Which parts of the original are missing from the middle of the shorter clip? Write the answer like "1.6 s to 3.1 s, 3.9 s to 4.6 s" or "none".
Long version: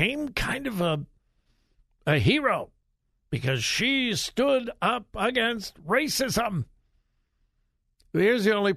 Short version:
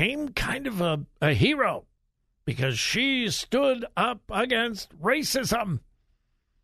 1.1 s to 2.0 s